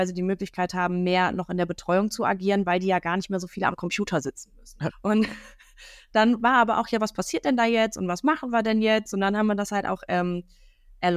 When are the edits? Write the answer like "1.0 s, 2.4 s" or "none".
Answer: 4.9 s